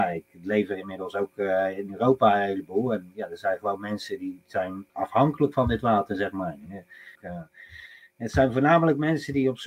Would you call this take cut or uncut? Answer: cut